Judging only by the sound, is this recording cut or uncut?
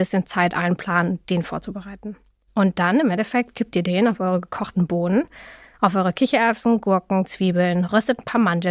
uncut